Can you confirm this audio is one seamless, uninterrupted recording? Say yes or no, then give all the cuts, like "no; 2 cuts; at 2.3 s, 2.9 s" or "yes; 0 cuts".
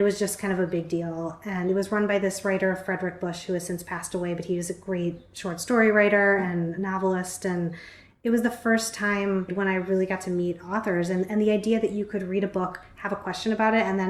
no; 1 cut; at 9.5 s